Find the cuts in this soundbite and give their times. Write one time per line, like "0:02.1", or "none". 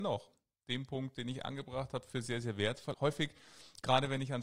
0:02.9